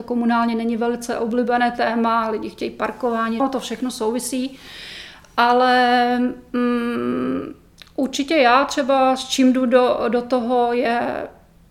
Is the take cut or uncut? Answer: cut